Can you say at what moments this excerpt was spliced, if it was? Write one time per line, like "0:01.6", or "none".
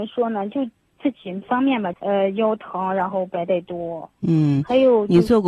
0:01.9